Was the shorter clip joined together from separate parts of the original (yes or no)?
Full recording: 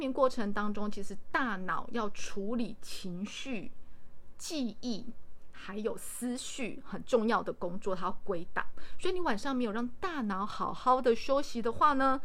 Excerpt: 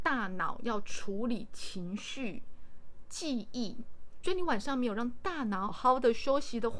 yes